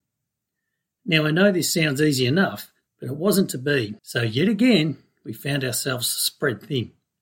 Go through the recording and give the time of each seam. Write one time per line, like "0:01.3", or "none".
0:04.0